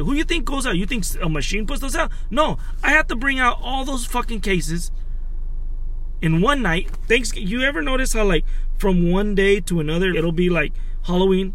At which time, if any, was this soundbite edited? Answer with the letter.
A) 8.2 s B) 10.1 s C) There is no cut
B